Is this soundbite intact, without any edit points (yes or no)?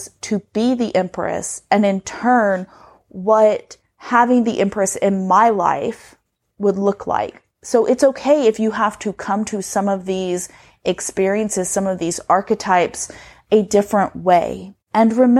yes